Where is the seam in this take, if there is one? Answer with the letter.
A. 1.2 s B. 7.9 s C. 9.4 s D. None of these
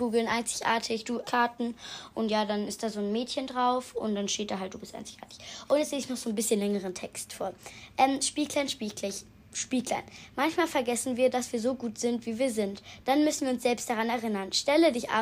A